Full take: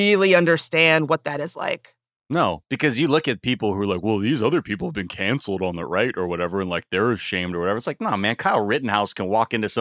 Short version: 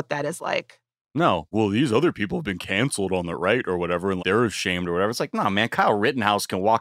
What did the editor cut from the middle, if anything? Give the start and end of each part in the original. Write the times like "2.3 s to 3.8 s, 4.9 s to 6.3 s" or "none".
2.7 s to 4.0 s, 6.7 s to 6.9 s